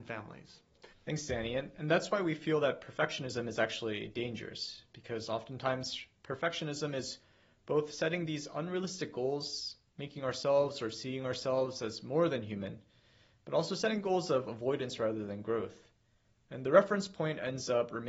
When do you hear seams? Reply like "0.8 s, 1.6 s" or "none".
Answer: 0.9 s